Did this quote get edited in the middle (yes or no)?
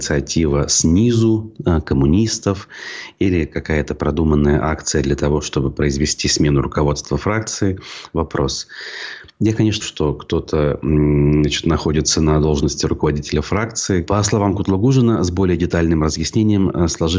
yes